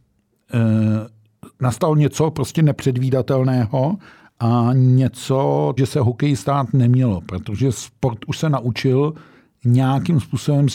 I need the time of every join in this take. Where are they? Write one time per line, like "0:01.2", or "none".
0:05.8